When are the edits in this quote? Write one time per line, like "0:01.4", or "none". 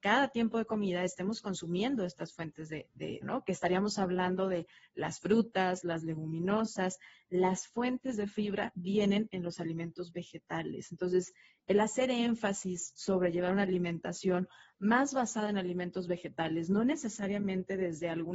0:03.2
0:05.8

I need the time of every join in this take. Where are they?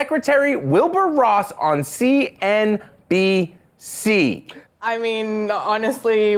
0:04.7

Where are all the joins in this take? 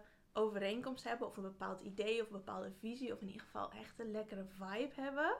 none

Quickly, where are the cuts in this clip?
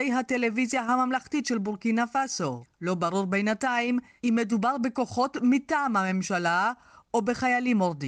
none

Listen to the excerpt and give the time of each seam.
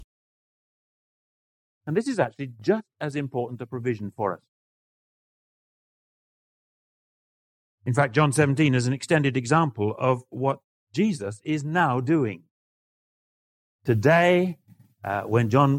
none

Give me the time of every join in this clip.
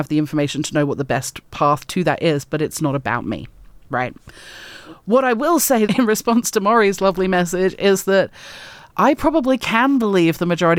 0:05.9

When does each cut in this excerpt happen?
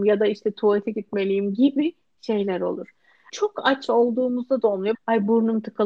0:03.3
0:04.9

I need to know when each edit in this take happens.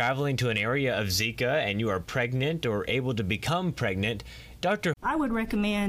0:04.9

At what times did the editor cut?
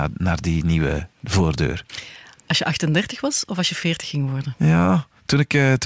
none

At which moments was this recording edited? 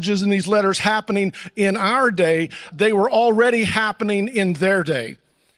0:02.7

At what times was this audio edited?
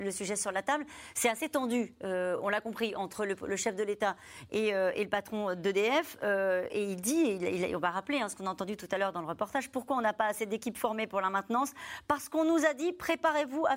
none

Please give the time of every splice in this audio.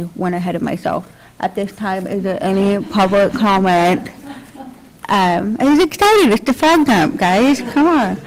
none

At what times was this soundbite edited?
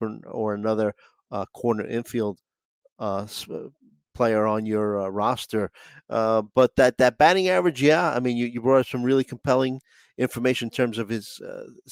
none

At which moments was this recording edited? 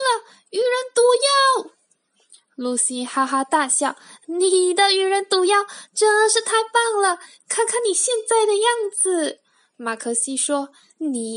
none

